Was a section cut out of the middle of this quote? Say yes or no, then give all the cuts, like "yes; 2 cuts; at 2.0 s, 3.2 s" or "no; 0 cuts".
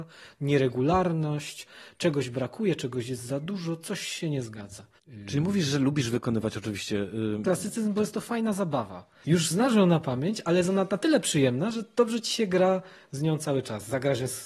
yes; 2 cuts; at 7.4 s, 9.2 s